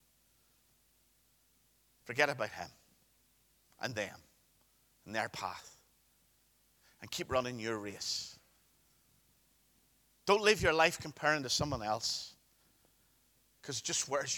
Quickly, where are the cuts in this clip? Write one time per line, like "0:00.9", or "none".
none